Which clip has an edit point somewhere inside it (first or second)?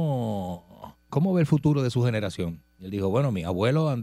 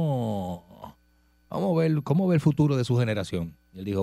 first